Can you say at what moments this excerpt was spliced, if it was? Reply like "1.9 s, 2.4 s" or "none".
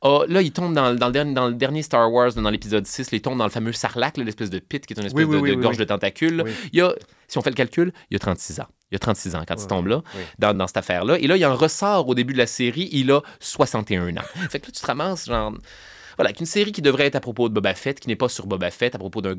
10.5 s, 14.5 s